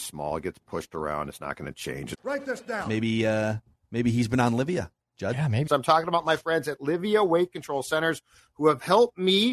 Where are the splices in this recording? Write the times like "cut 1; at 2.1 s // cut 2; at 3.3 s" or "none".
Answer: cut 1; at 2.1 s // cut 2; at 5.7 s